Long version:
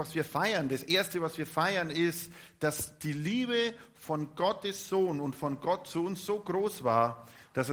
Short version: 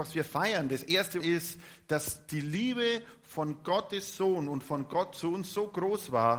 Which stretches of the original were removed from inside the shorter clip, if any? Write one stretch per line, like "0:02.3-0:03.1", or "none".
0:01.2-0:01.9